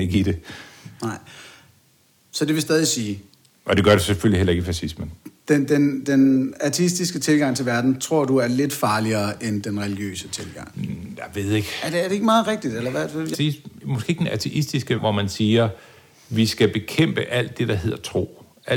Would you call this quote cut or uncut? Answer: cut